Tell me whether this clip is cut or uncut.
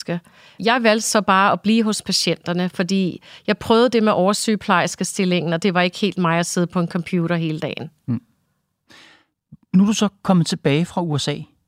uncut